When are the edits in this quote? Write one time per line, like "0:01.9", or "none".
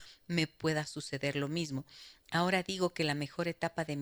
none